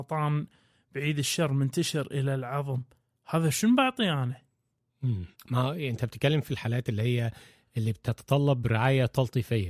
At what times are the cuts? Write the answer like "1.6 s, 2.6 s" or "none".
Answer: 5.3 s